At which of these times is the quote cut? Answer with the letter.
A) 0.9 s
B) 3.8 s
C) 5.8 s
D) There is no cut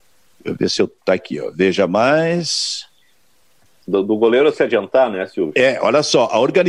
B